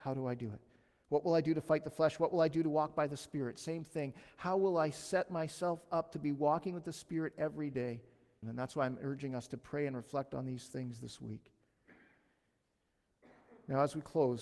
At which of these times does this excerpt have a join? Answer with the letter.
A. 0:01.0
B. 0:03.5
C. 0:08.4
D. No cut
C